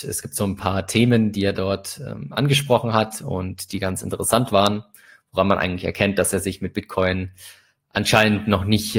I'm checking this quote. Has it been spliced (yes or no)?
no